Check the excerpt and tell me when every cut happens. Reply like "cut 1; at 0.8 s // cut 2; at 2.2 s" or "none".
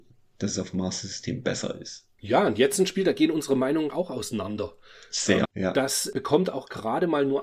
cut 1; at 3.9 s // cut 2; at 5.5 s